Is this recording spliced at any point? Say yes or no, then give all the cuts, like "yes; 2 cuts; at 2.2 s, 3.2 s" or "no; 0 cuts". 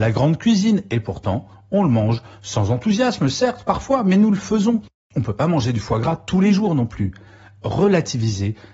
no; 0 cuts